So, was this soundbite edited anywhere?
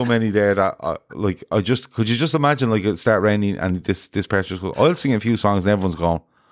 no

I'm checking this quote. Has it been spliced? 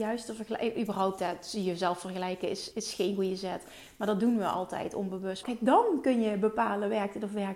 yes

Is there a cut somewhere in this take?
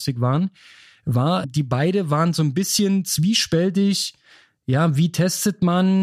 yes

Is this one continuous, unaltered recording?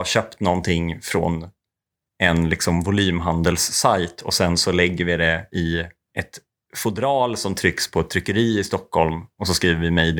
yes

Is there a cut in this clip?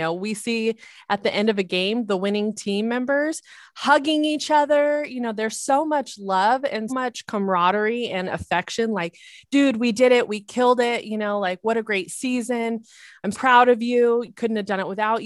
yes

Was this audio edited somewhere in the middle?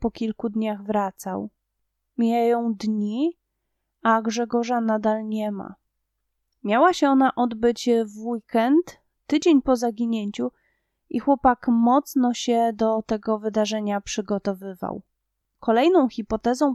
yes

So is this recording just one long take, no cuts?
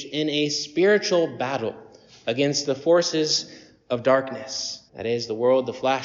no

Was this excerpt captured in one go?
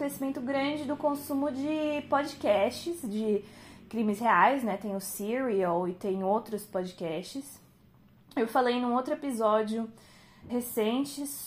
no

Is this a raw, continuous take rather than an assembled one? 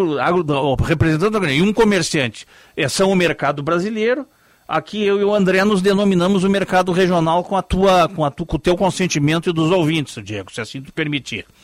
yes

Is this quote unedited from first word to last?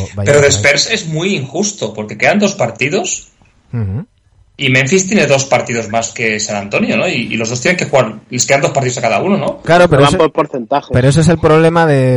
yes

